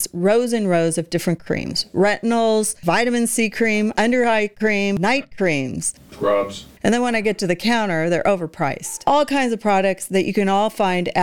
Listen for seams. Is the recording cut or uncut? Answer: uncut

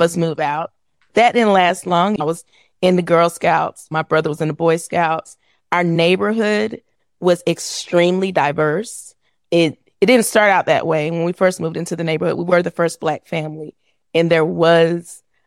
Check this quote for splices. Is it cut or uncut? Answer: cut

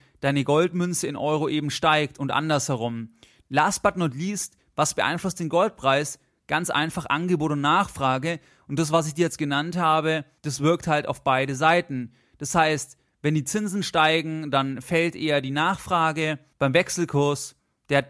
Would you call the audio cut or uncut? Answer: cut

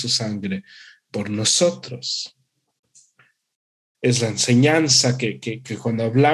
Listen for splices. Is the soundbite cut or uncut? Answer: cut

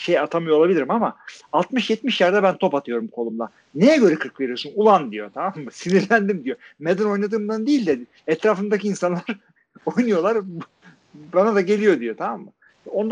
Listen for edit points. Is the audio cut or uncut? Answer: uncut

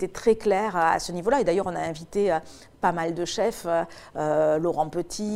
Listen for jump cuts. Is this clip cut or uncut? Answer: uncut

